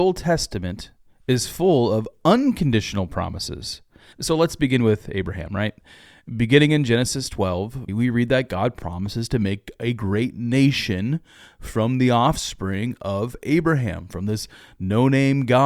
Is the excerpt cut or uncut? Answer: cut